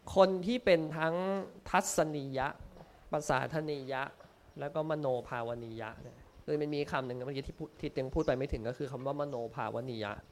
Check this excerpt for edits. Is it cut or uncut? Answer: uncut